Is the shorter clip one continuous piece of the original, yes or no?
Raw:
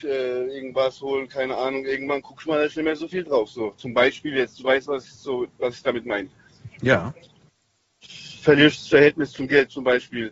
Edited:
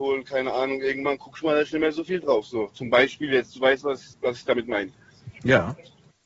no